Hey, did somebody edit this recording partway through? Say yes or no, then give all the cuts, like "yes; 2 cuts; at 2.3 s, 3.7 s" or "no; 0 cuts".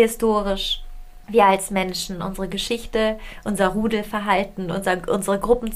no; 0 cuts